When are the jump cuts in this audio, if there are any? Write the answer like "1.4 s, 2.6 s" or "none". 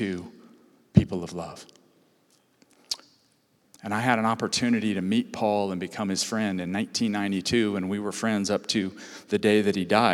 3.6 s

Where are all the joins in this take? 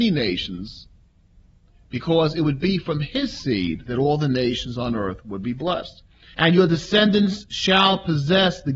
6.3 s

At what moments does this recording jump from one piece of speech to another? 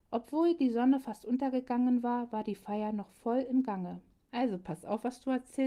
4.3 s

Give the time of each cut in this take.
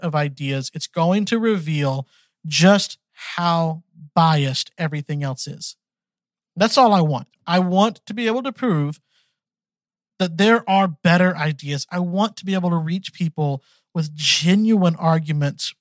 none

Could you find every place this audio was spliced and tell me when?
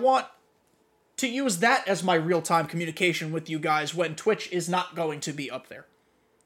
none

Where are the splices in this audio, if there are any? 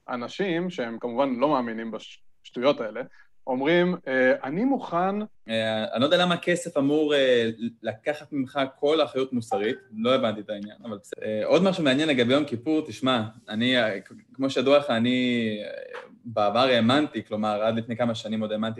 5.3 s, 11.1 s

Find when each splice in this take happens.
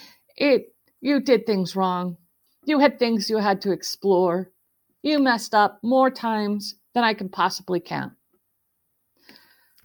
2.5 s

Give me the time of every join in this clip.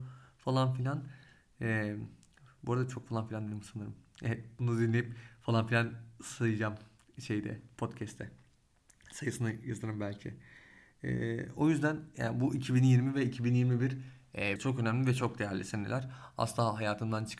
14.6 s

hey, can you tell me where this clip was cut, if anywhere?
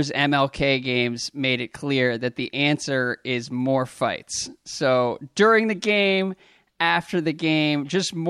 none

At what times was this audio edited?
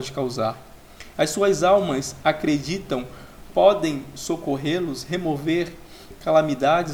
1.1 s

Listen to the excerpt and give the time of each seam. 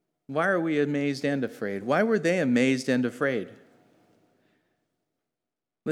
none

